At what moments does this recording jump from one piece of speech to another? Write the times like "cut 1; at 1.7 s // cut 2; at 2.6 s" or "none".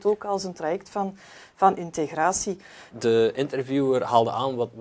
cut 1; at 2.9 s

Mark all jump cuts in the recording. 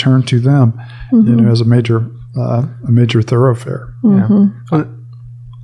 none

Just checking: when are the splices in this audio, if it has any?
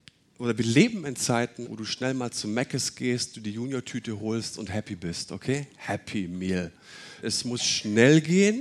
cut 1; at 1.6 s // cut 2; at 7.2 s

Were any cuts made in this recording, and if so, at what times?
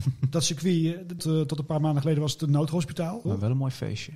cut 1; at 1.2 s // cut 2; at 3.2 s

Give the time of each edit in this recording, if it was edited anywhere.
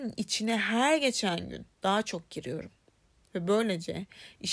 none

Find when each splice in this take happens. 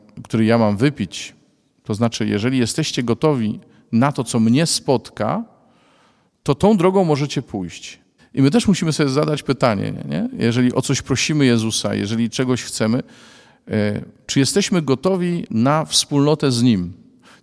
cut 1; at 8.2 s

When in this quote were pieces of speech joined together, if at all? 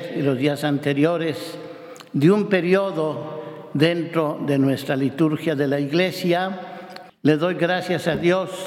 cut 1; at 7.1 s

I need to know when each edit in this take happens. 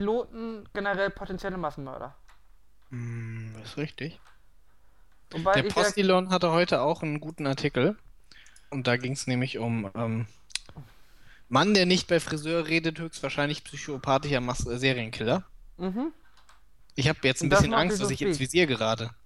cut 1; at 8.7 s // cut 2; at 16.9 s

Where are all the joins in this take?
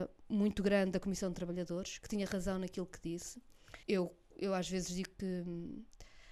cut 1; at 3.8 s

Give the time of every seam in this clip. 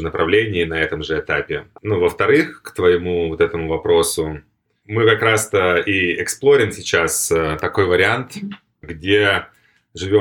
cut 1; at 1.8 s

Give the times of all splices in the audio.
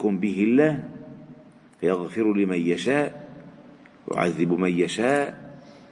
none

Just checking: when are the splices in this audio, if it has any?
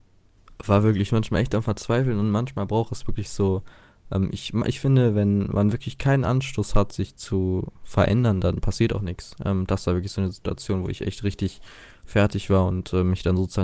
none

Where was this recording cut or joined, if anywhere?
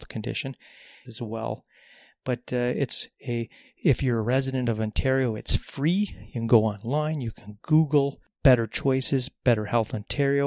cut 1; at 1.0 s

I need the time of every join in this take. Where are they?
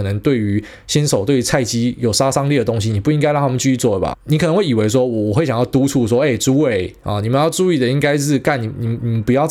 cut 1; at 4.1 s

